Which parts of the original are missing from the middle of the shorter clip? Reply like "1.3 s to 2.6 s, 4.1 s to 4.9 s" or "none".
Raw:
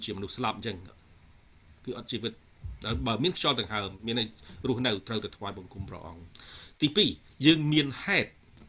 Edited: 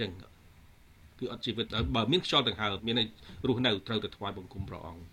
2.3 s to 2.8 s, 3.9 s to 4.0 s